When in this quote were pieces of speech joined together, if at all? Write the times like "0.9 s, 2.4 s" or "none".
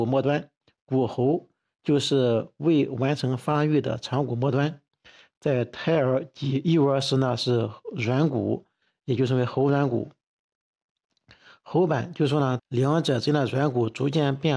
12.6 s